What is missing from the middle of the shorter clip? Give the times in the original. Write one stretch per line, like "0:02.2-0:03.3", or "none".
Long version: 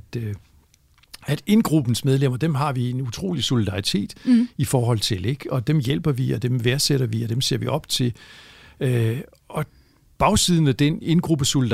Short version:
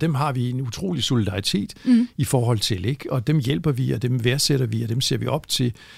none